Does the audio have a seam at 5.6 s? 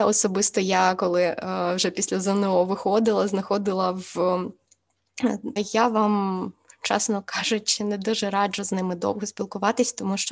yes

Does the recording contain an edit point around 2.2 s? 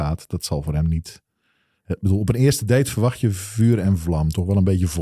no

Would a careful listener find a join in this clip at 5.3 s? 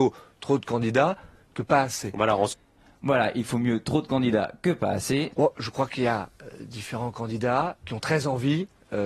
yes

